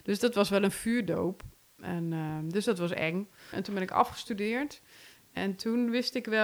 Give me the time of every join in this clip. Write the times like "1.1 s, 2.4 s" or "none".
3.5 s